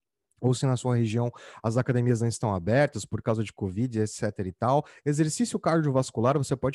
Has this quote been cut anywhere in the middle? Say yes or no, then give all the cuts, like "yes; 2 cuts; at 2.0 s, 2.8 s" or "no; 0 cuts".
no; 0 cuts